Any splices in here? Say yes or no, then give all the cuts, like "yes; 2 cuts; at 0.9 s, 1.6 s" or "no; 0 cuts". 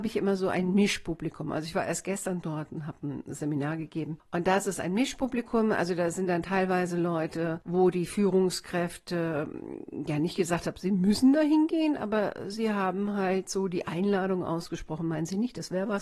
no; 0 cuts